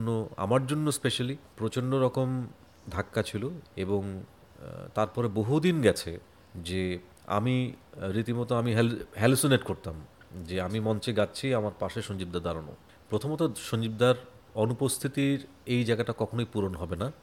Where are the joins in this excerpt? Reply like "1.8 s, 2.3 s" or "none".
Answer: 3.6 s

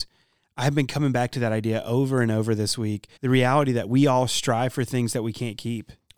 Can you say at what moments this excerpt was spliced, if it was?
3.2 s

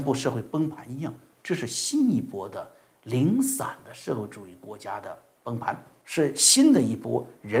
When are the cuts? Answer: 6.0 s

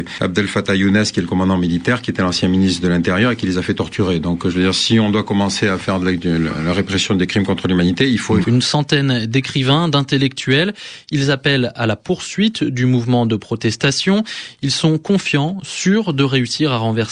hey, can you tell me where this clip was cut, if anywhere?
8.4 s

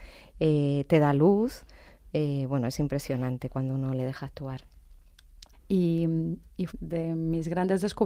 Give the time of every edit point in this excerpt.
5.5 s, 6.7 s

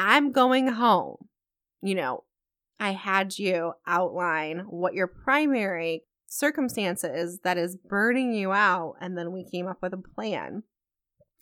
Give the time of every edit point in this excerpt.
2.7 s

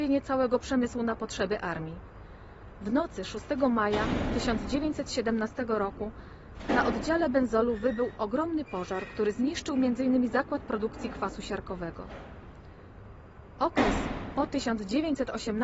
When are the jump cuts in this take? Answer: 8.2 s

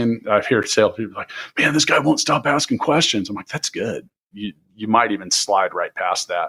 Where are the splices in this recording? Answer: 4.3 s

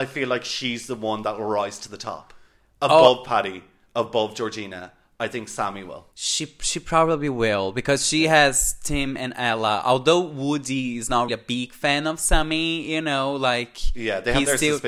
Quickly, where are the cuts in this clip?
6.1 s, 11.3 s

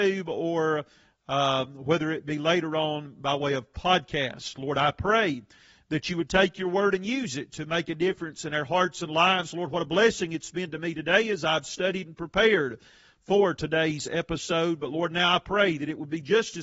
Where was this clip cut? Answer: none

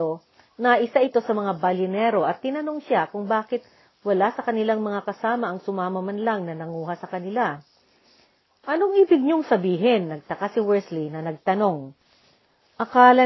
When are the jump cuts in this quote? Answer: none

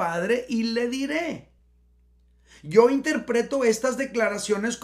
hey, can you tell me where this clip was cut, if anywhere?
none

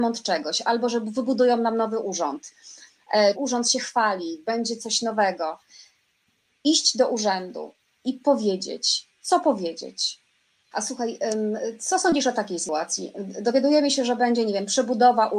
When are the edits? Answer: 3.3 s, 10.7 s

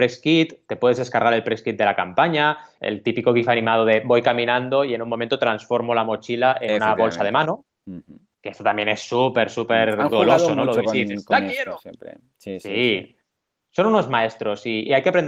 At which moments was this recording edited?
2.8 s

